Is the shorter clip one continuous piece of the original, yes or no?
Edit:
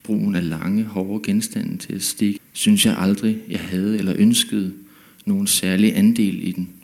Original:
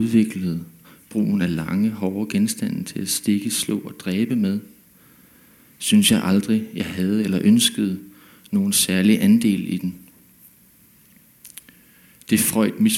no